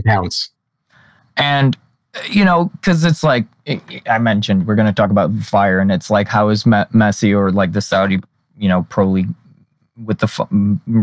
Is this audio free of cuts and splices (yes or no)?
yes